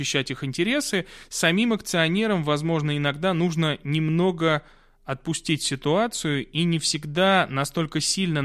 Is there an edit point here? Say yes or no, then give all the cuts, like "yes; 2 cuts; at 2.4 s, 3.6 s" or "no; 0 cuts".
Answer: no; 0 cuts